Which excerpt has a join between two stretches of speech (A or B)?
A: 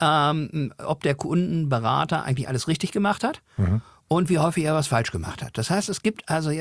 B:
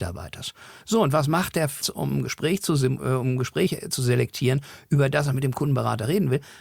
B